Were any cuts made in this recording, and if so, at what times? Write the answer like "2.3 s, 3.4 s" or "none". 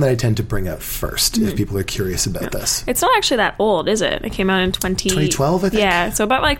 none